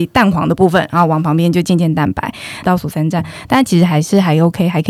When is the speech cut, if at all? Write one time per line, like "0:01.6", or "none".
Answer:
0:02.6